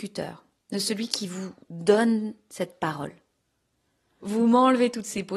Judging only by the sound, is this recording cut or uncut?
cut